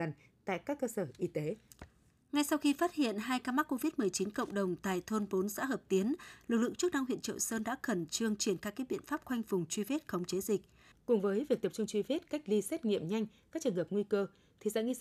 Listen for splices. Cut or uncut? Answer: cut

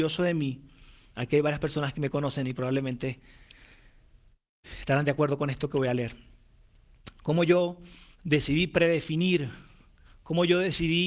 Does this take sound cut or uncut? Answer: cut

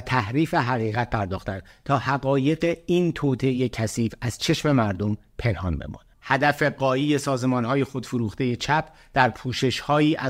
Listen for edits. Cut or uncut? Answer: cut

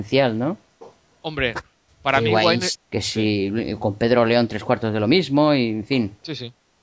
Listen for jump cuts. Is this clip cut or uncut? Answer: cut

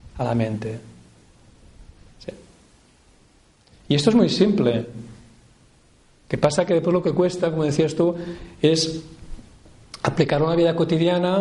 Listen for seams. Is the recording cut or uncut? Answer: uncut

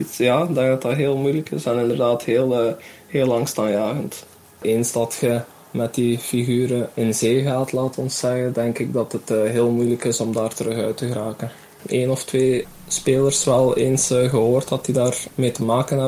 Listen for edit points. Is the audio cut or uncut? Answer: uncut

